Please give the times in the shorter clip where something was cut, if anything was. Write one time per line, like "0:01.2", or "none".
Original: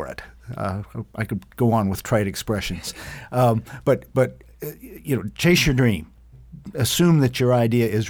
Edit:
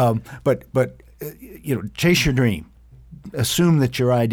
none